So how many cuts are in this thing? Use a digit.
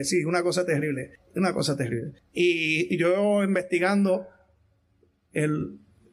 0